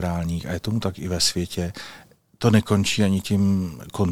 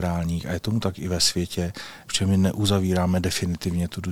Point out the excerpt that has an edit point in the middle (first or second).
second